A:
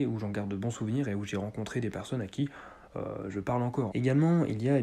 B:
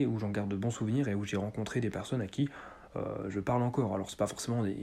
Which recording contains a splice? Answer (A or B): A